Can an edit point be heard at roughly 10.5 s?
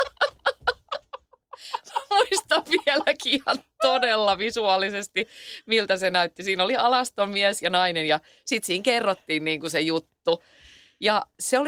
no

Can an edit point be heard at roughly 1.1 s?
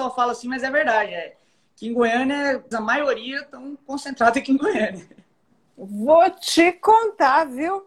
no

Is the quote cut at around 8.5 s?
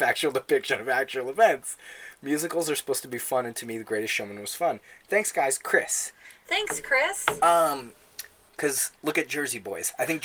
yes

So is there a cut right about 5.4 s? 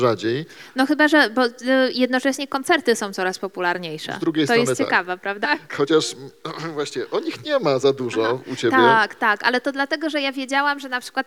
yes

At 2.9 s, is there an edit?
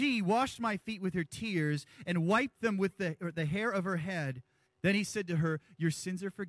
no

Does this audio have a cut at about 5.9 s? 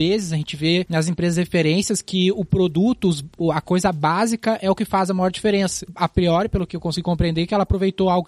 yes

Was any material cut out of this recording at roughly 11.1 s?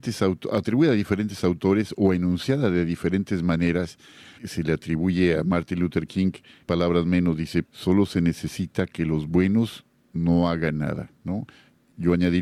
no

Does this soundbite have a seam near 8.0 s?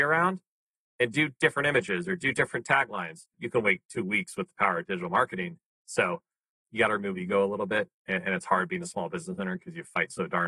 no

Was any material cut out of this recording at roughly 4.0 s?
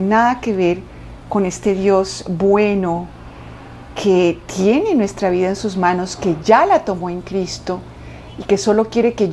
no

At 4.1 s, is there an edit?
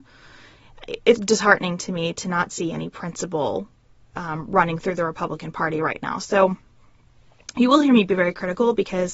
no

